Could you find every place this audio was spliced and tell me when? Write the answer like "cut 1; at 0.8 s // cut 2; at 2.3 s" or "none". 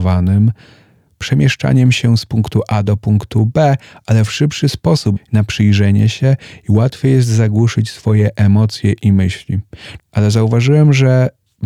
cut 1; at 5.2 s // cut 2; at 10.0 s